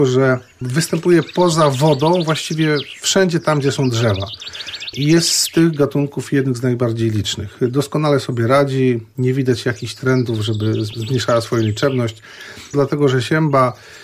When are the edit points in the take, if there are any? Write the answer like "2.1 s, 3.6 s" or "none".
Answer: 12.7 s